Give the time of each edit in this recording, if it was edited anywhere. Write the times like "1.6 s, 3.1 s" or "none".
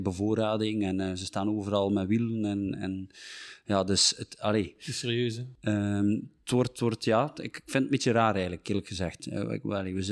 none